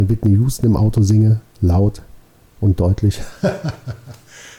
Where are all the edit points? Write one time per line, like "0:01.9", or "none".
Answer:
none